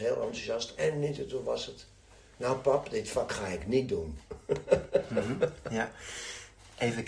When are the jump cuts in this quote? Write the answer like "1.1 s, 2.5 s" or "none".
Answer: none